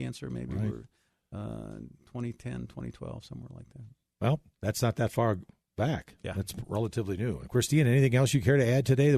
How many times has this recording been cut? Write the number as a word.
zero